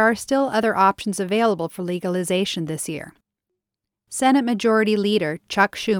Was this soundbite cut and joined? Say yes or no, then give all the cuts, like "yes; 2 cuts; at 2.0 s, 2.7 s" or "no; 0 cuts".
no; 0 cuts